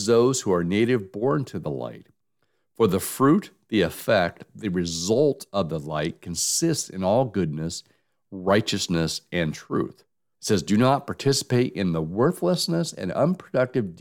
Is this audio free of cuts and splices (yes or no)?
no